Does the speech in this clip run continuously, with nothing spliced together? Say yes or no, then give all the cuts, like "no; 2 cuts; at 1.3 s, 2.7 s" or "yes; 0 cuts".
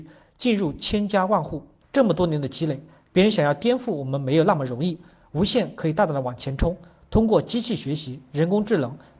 no; 1 cut; at 1.8 s